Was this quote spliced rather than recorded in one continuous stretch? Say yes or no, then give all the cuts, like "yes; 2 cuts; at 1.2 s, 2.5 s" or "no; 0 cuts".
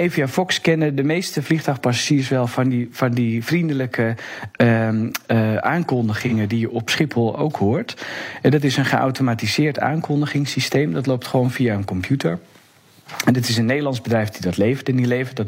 no; 0 cuts